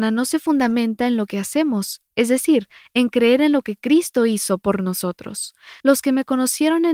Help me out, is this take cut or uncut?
cut